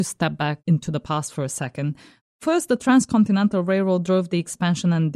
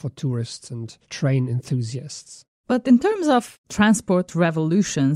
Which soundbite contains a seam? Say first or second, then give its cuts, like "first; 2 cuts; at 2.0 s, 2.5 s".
second; 1 cut; at 1.0 s